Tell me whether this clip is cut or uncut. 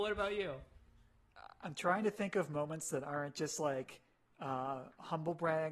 uncut